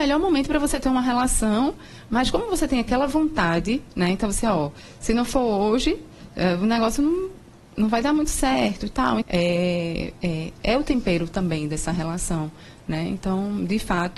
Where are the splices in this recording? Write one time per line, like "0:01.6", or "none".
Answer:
0:09.2